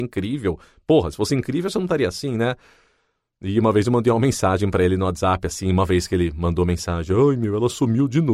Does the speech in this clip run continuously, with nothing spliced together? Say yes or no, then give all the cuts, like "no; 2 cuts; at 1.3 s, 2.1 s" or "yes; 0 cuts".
yes; 0 cuts